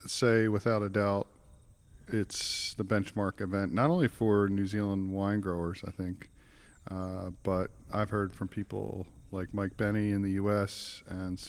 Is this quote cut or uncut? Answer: uncut